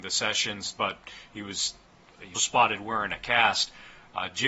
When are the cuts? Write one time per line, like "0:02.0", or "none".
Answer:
0:02.4